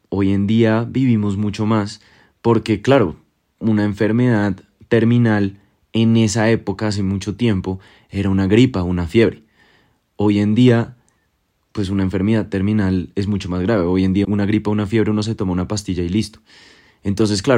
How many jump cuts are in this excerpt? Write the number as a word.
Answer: one